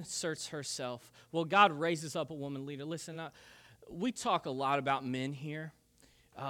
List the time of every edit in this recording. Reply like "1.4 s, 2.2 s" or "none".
none